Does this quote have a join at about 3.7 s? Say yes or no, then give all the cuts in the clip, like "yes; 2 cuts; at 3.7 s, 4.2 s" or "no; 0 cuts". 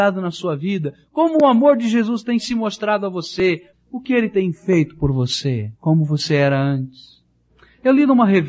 yes; 2 cuts; at 3.7 s, 5.8 s